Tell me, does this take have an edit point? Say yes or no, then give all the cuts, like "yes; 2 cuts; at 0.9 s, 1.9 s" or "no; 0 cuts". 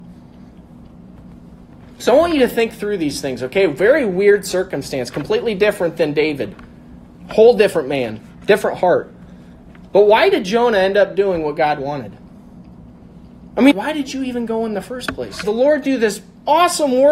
yes; 2 cuts; at 13.7 s, 15.4 s